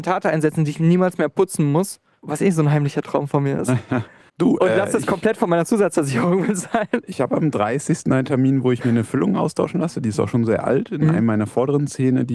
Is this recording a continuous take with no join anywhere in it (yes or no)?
no